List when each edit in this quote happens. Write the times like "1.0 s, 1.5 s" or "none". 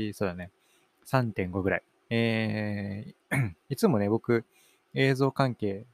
2.0 s